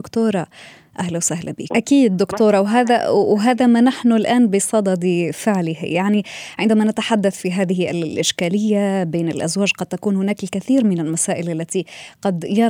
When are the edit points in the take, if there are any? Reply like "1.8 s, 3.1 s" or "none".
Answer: 1.7 s